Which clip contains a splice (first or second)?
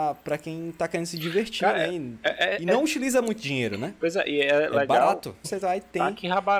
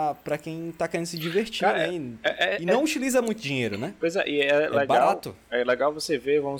first